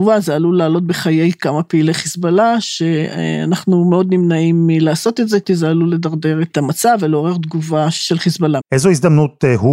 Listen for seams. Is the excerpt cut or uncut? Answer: cut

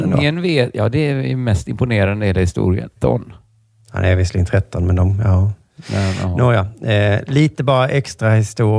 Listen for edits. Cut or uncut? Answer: cut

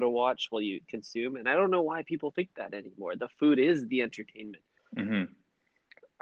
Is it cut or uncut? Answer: cut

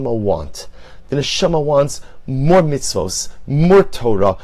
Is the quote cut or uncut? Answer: cut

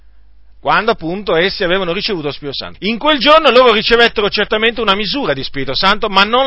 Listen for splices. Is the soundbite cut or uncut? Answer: cut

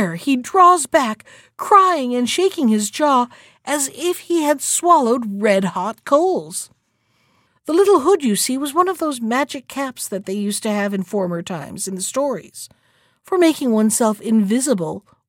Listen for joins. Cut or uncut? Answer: cut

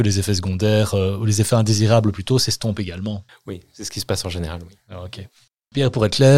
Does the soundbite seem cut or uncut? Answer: uncut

